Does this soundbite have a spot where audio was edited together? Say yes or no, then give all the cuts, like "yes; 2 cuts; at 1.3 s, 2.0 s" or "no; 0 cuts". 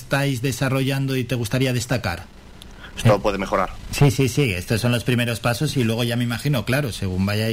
yes; 1 cut; at 3.0 s